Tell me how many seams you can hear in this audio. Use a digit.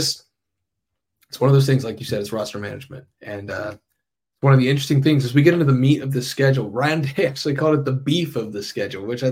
0